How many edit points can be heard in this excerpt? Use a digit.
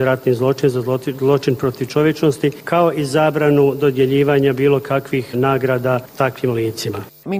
1